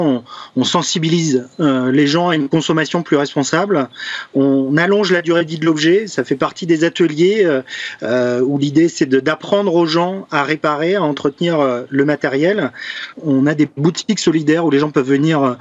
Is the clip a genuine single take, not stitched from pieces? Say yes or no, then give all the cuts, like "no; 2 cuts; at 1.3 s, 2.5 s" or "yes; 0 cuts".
no; 1 cut; at 13.1 s